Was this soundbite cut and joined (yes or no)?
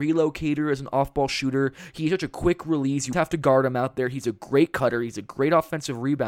yes